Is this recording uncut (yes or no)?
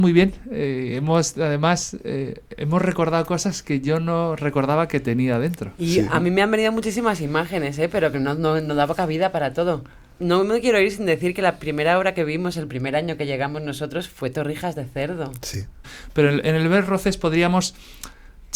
no